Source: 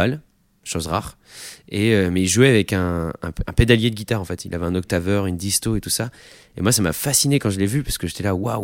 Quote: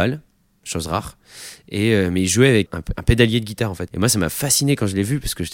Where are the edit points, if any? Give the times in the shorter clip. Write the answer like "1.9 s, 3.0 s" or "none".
2.7 s, 3.9 s